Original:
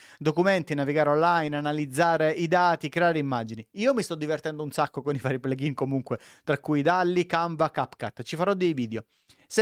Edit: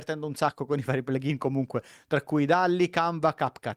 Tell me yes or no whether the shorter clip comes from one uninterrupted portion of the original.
yes